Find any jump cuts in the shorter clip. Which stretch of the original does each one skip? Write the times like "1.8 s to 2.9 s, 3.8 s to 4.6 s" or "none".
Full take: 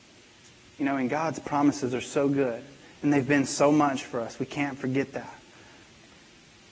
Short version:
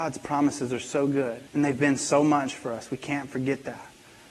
2.7 s to 3.0 s